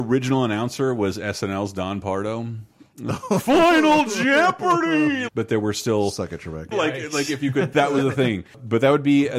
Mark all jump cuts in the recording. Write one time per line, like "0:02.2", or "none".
0:05.3
0:06.7
0:07.7

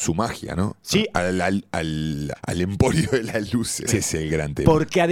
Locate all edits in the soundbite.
0:01.1
0:02.3
0:03.9

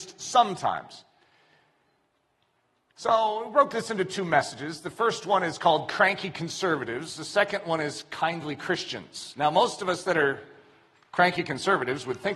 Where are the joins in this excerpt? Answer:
none

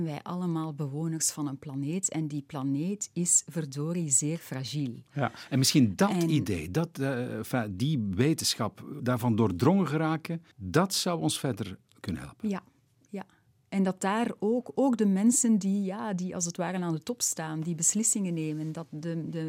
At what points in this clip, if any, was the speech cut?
0:09.0
0:10.5

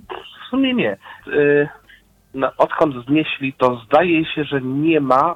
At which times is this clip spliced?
0:01.2
0:03.5

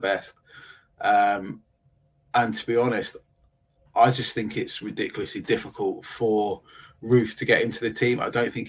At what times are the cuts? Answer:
none

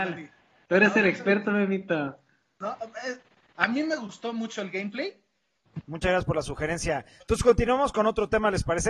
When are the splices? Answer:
0:05.8

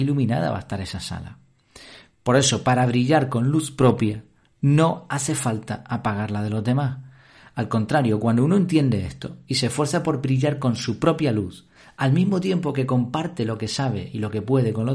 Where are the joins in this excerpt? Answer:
none

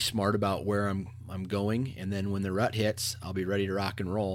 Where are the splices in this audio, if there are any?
none

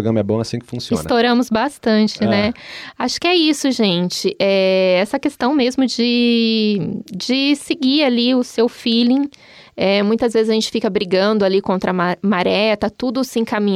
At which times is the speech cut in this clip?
none

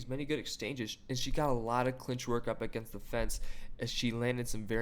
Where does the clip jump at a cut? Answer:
0:03.9

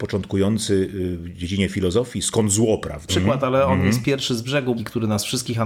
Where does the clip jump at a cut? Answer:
0:03.1
0:04.8

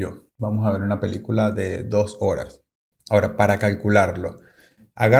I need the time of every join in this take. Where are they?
0:02.9

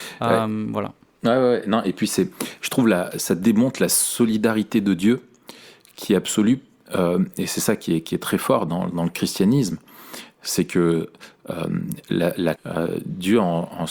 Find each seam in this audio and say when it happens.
0:12.6

